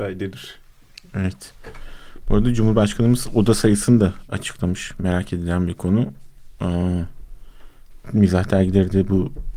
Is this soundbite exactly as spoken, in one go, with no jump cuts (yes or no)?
yes